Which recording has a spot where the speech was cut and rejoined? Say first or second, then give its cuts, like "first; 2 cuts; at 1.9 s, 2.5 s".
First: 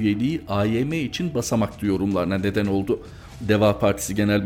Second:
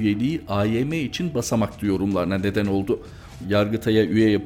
second; 1 cut; at 3.4 s